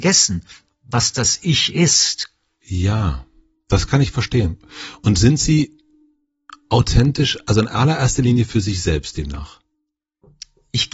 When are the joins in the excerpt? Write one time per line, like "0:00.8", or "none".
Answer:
none